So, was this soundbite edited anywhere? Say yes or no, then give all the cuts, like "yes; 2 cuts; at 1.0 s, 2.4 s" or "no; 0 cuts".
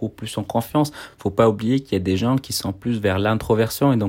no; 0 cuts